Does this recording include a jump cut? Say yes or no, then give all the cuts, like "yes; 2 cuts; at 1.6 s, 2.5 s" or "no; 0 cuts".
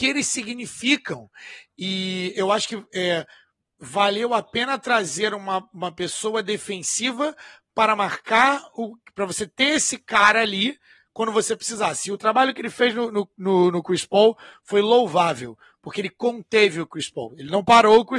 no; 0 cuts